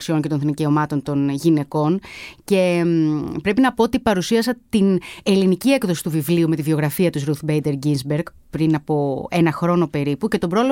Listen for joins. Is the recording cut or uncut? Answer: uncut